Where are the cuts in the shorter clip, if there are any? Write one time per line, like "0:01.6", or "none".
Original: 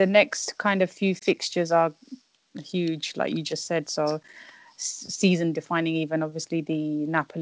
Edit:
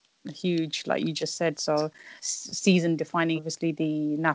0:02.2
0:03.4